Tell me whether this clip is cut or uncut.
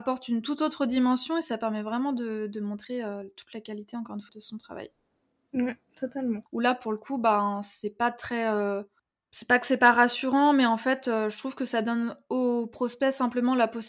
cut